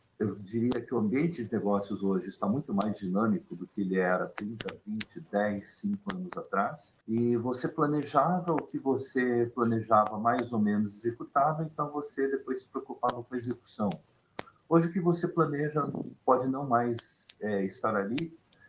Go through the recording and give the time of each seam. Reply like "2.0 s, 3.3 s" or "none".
7.0 s